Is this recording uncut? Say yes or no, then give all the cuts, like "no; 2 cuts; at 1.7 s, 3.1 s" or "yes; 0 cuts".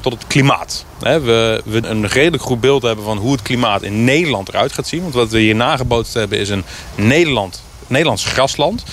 no; 1 cut; at 1.8 s